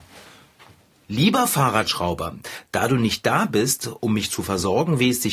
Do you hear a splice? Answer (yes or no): yes